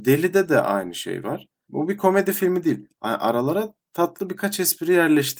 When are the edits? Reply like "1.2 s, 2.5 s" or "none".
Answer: none